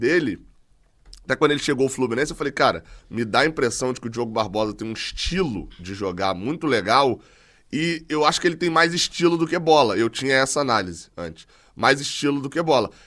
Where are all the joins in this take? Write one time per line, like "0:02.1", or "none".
none